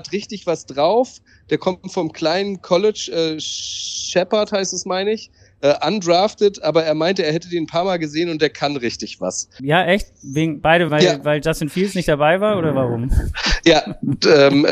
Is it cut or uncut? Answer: cut